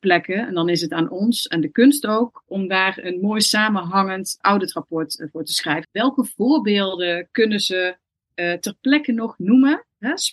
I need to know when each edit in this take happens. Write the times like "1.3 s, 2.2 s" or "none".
4.4 s, 5.8 s